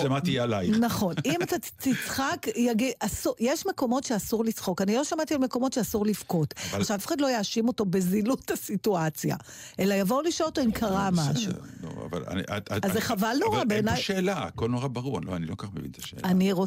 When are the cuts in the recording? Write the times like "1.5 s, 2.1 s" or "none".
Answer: 7.0 s